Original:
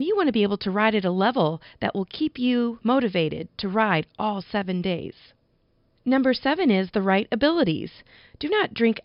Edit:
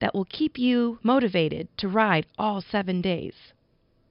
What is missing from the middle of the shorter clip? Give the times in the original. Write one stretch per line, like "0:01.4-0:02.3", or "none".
none